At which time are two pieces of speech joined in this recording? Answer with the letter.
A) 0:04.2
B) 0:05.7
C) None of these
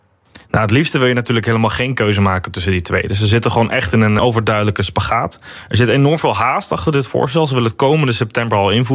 A